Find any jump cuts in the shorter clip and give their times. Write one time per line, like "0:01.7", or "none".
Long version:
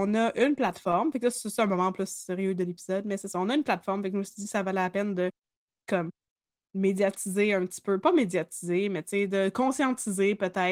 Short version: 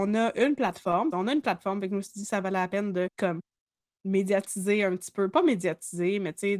0:01.1
0:03.1

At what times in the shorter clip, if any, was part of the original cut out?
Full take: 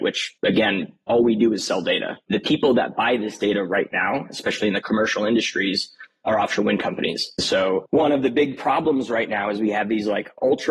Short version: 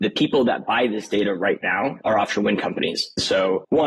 0:02.0

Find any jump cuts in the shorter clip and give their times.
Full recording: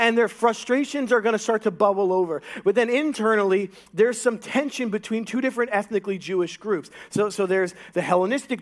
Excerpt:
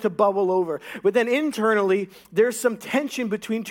none

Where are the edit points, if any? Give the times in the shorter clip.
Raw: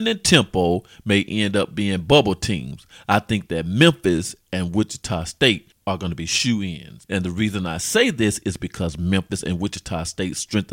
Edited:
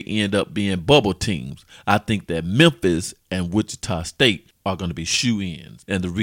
none

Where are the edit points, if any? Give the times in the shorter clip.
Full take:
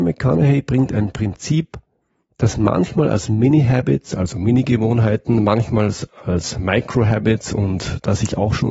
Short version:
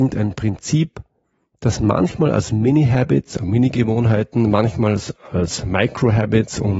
0:03.4

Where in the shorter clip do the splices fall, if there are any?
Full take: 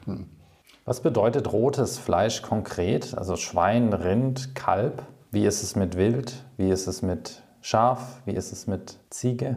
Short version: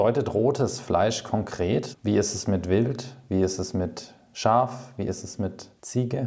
0:01.9

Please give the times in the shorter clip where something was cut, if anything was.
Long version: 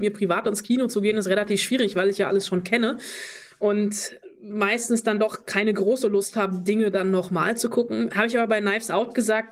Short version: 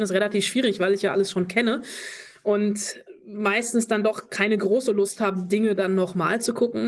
none

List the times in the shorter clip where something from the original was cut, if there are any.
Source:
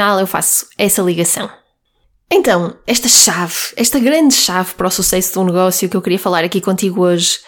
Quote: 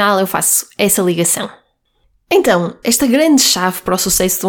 0:02.8

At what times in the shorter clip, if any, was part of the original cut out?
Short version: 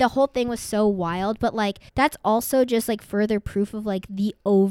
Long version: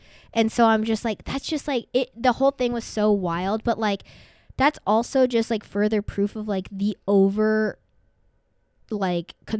0:01.9

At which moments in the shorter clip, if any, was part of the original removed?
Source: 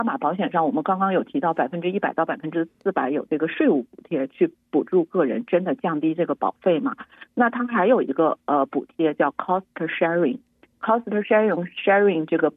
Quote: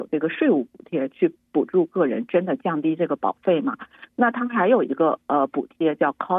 none

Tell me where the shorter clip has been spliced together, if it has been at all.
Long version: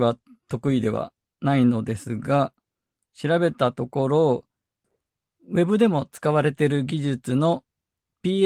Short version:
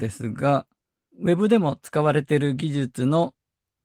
0:01.1

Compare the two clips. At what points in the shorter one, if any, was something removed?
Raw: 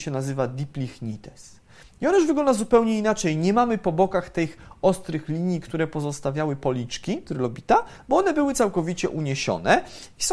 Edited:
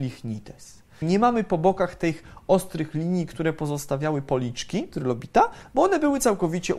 0:01.0

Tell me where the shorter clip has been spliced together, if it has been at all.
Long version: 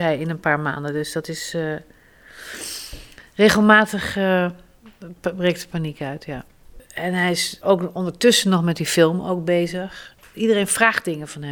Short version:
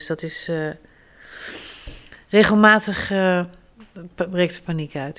none

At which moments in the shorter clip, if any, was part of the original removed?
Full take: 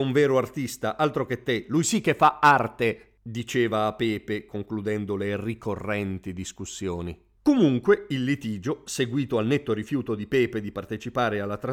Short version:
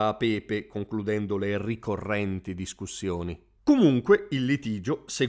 none

